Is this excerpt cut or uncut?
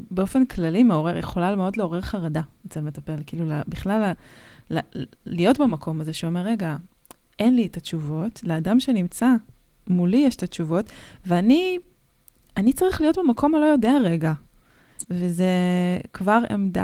cut